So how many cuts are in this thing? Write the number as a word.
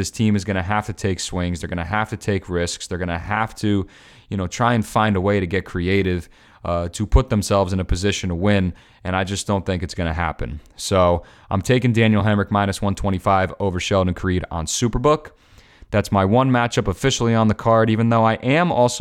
zero